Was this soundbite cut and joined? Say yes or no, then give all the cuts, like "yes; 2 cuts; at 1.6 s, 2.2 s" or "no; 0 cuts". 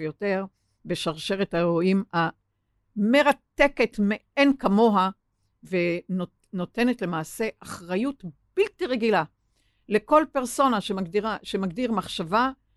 no; 0 cuts